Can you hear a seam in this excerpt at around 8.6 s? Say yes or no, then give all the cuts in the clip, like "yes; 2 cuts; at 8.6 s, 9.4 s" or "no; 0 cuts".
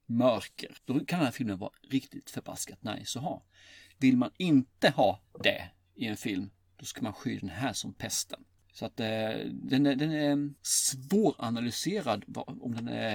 yes; 1 cut; at 8.6 s